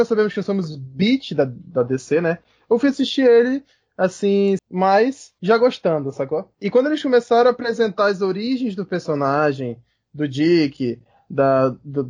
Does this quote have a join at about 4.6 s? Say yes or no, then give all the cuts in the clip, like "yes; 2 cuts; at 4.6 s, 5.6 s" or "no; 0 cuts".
yes; 1 cut; at 4.6 s